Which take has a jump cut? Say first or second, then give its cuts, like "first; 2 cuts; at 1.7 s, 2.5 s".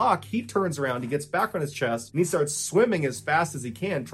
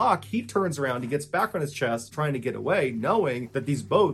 second; 1 cut; at 2.1 s